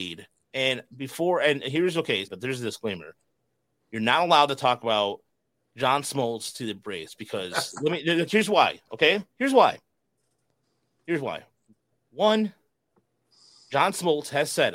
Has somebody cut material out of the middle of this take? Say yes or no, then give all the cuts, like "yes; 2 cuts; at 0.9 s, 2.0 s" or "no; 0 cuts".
yes; 1 cut; at 2.3 s